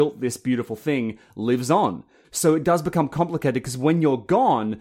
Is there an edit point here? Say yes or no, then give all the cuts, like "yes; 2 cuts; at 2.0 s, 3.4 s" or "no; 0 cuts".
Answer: yes; 1 cut; at 2.2 s